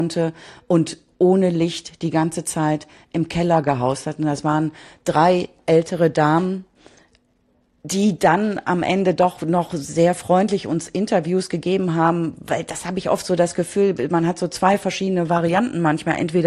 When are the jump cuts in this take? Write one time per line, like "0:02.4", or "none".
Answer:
none